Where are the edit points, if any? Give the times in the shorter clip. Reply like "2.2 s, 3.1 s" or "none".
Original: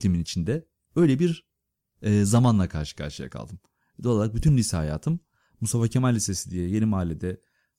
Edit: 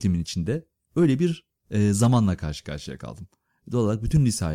1.6 s